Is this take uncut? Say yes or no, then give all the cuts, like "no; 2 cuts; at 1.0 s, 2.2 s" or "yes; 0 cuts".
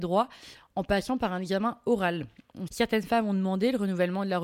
no; 1 cut; at 2.7 s